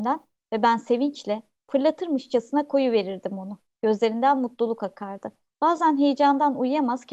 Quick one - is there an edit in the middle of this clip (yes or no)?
yes